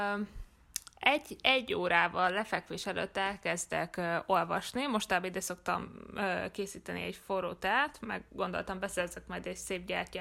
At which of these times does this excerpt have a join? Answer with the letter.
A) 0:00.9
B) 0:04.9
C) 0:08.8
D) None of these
D